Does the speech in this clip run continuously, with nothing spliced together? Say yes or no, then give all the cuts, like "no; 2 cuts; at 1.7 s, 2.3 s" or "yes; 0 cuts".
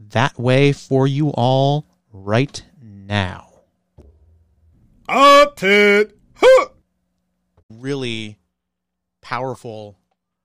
yes; 0 cuts